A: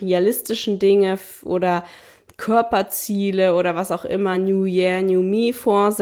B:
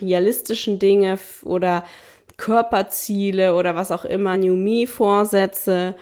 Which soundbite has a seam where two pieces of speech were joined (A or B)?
B